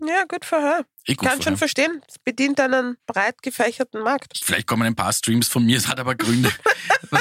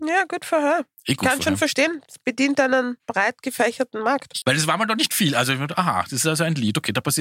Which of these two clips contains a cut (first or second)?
second